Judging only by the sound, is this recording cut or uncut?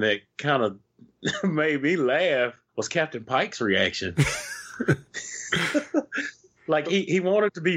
cut